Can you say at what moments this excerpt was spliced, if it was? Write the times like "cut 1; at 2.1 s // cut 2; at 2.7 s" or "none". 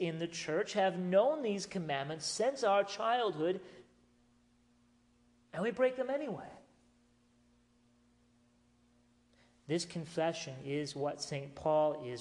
none